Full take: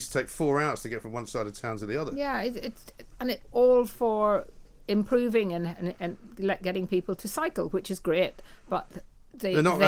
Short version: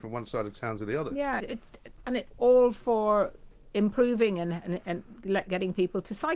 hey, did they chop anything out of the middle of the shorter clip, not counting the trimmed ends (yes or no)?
yes